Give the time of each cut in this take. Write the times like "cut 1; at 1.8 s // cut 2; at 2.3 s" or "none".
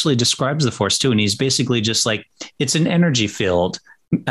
none